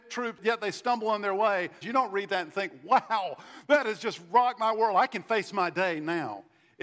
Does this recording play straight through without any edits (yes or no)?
no